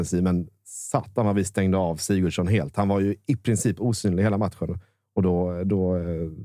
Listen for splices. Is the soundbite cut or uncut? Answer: uncut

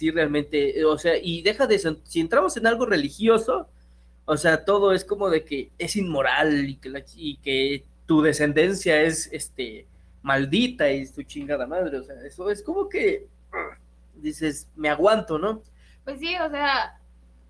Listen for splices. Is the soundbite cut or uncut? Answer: cut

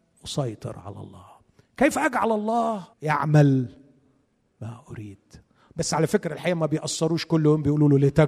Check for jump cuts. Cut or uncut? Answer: cut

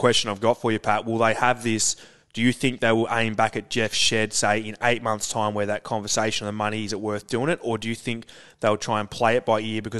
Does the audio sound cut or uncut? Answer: uncut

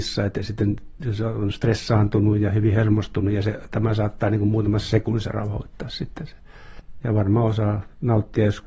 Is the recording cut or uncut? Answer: cut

